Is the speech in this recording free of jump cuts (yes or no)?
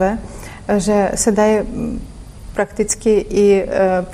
yes